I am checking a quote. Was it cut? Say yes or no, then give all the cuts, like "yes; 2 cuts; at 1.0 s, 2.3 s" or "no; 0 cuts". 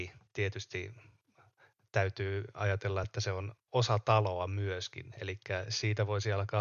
no; 0 cuts